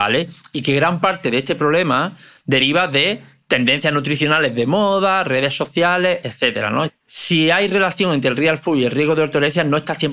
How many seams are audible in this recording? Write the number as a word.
one